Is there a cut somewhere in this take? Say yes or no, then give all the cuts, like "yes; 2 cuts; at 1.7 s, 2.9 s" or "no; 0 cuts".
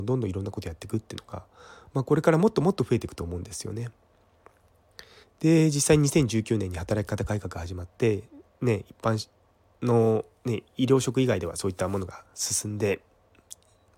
yes; 1 cut; at 5.2 s